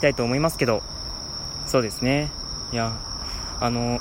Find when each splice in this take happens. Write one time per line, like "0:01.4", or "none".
none